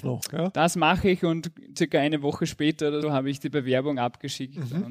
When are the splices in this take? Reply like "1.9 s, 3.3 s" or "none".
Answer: 3.0 s